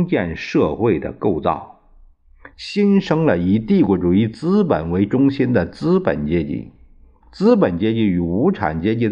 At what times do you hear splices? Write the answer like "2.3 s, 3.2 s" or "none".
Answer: 2.5 s, 7.2 s